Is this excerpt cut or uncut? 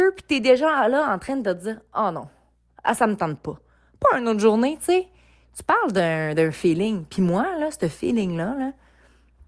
uncut